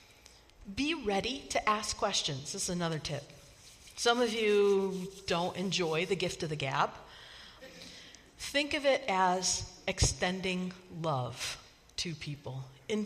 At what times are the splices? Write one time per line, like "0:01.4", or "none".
0:07.6